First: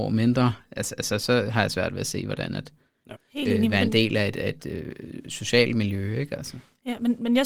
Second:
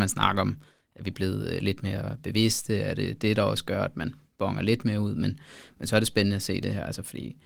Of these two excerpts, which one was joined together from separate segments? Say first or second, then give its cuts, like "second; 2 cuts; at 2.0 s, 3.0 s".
first; 1 cut; at 3.2 s